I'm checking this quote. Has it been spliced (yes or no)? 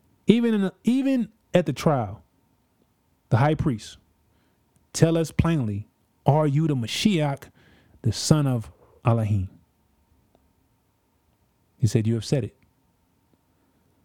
no